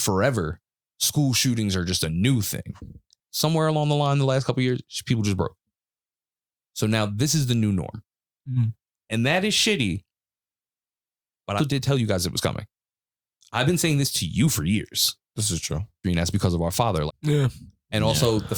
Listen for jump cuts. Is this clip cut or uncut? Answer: cut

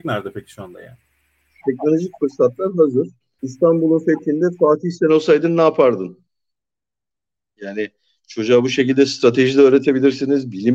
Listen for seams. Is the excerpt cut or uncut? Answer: cut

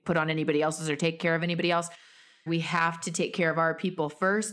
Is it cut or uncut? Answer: cut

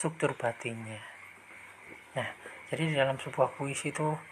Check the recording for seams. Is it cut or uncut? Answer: uncut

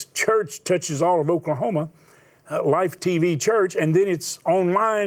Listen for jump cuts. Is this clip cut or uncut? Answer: uncut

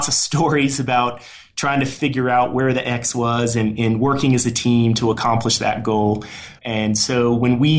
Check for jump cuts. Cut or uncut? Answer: cut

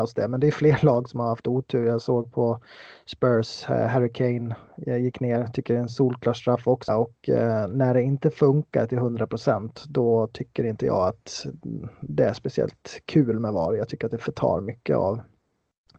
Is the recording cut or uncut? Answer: cut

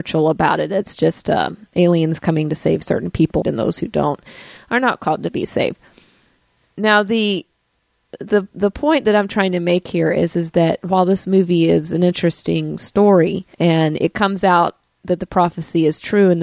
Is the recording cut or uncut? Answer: cut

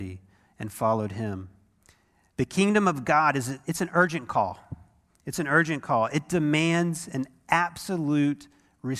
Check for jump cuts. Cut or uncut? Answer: uncut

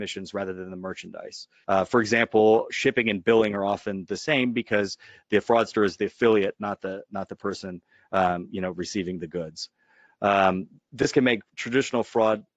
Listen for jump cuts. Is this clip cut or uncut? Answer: cut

